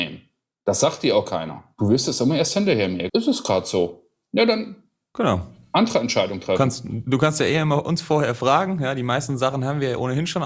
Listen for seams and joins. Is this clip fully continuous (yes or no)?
no